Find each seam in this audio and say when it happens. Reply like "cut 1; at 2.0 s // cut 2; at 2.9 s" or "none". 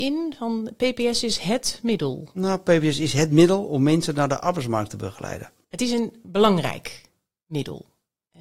none